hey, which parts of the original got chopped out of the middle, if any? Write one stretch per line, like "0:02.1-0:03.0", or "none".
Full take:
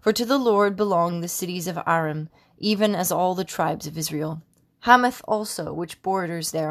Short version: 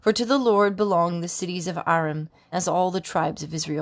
0:02.5-0:03.0

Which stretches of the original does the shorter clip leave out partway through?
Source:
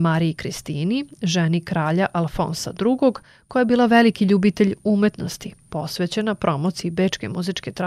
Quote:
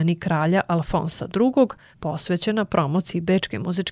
0:03.4-0:05.6

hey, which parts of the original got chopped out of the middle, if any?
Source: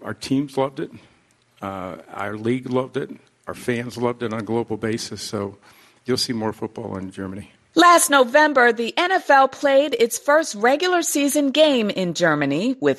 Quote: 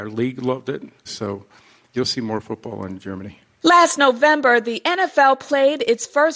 0:03.3-0:05.2

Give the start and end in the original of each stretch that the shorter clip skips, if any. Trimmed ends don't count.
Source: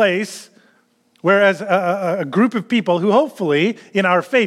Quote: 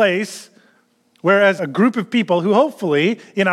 0:01.6-0:02.2

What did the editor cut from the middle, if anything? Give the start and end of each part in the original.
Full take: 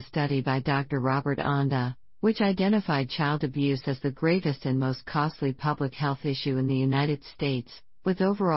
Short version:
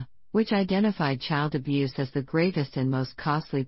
none

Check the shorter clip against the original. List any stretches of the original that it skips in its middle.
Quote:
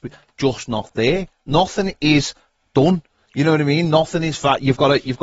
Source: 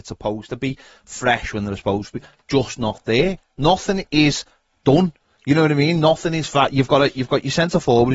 none

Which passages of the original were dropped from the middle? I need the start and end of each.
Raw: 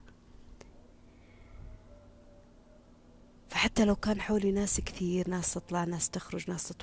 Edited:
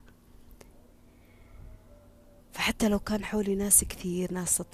0:02.4-0:03.4

